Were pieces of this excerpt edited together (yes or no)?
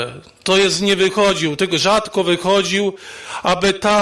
no